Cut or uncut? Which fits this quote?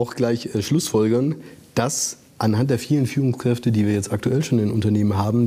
uncut